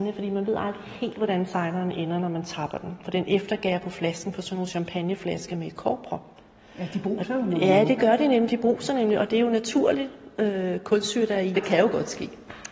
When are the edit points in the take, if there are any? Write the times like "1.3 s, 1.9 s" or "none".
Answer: 11.5 s